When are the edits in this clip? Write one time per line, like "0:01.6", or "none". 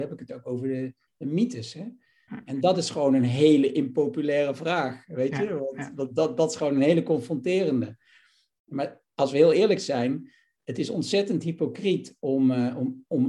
0:02.3